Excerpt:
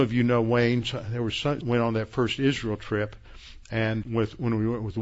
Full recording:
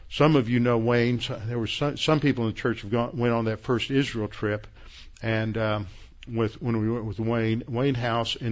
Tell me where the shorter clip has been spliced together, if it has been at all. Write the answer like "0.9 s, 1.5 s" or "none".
1.6 s, 4.0 s